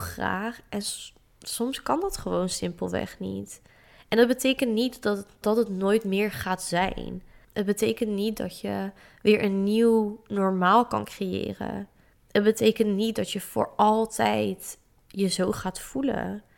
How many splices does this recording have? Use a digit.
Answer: 1